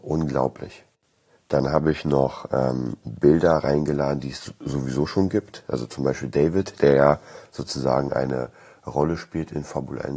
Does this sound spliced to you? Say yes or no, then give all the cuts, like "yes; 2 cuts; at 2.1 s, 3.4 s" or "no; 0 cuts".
no; 0 cuts